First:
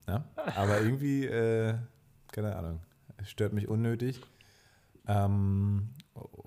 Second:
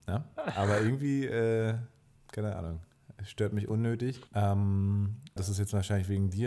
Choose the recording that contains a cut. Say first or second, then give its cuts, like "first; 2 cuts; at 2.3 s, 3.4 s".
second; 2 cuts; at 4.3 s, 5.4 s